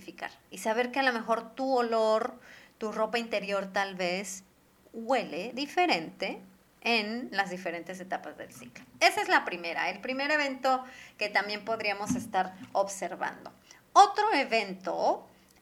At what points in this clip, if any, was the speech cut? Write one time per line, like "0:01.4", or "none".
none